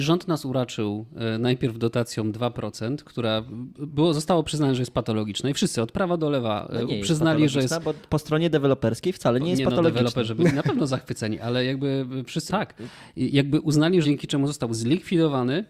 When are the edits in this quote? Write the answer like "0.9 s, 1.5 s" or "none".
12.5 s, 14.0 s